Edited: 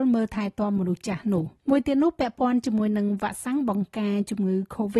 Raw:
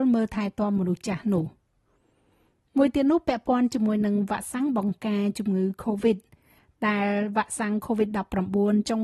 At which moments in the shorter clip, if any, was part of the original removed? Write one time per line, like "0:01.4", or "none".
0:01.6